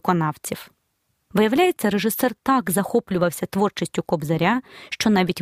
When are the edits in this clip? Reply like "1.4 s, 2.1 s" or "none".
1.3 s